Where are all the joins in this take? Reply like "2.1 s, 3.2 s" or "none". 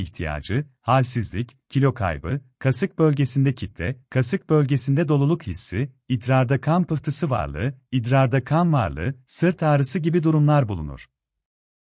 none